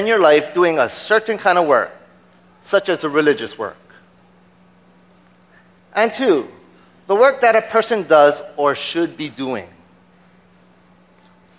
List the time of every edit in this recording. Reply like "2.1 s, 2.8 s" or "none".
none